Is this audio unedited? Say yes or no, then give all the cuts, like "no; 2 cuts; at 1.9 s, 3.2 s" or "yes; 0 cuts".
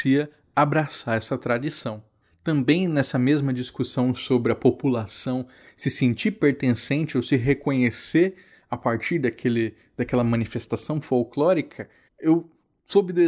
yes; 0 cuts